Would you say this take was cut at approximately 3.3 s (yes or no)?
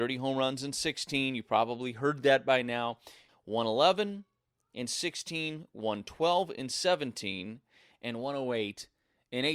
yes